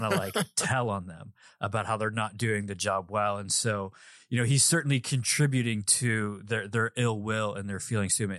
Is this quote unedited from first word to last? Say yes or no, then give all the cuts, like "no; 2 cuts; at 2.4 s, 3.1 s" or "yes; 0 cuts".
yes; 0 cuts